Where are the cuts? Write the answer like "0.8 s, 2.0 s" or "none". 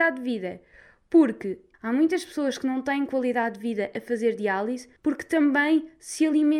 1.7 s, 5.0 s